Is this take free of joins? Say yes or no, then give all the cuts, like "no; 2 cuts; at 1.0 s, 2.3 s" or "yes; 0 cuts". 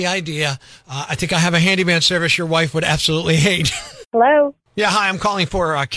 no; 1 cut; at 4.0 s